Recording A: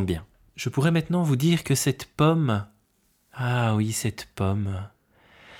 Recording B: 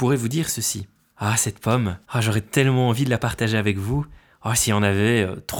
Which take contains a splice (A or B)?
B